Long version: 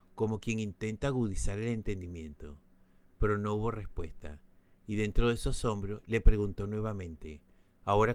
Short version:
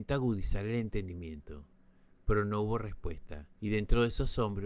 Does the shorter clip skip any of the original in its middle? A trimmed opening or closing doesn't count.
yes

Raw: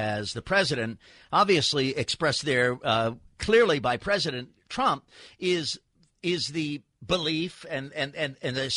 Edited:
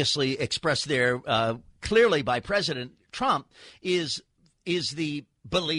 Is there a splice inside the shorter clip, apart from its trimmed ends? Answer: no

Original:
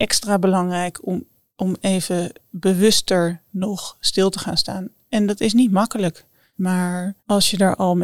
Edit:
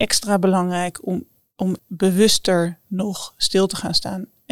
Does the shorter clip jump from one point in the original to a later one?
yes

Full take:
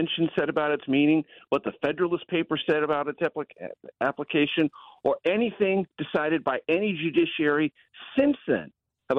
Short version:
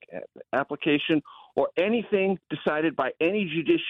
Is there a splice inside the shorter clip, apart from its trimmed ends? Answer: no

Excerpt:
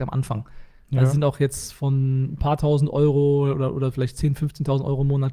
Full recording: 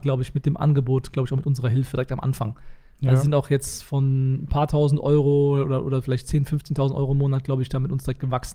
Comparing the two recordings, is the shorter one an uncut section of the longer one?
yes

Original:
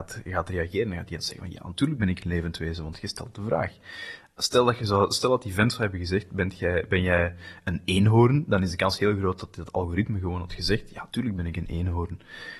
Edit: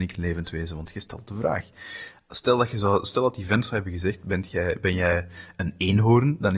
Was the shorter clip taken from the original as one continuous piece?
yes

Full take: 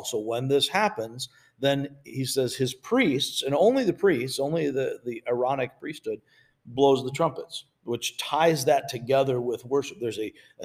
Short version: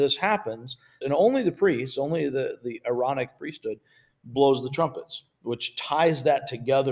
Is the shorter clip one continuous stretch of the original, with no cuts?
no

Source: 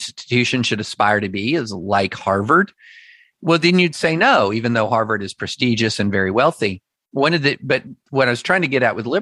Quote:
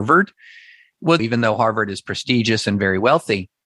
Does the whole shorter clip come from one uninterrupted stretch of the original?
no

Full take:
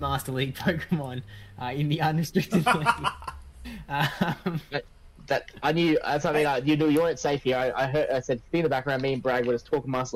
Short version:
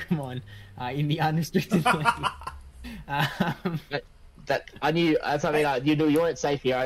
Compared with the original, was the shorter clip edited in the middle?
no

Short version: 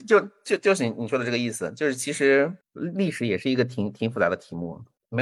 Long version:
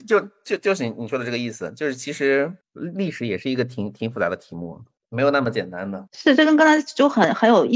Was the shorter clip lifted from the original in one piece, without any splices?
yes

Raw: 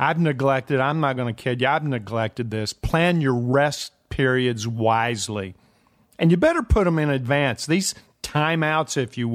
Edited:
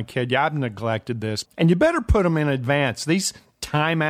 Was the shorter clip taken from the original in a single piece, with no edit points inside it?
no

